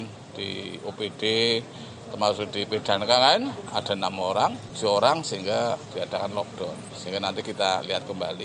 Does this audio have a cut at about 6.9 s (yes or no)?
no